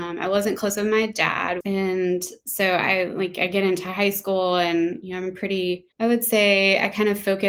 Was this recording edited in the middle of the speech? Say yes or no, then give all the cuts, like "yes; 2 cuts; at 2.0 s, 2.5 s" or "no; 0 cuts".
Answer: yes; 2 cuts; at 1.6 s, 5.9 s